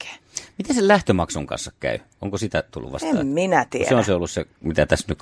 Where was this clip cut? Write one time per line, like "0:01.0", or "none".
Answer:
none